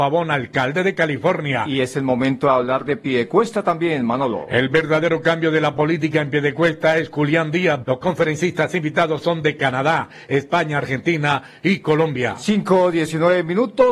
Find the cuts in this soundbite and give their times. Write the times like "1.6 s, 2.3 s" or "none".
7.8 s